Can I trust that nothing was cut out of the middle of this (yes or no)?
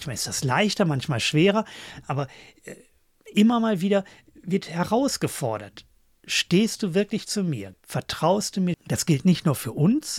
no